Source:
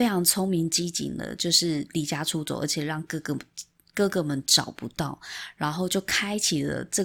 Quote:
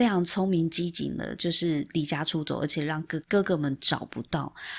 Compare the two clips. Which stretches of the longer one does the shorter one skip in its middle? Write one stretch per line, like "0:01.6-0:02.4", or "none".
0:03.2-0:03.9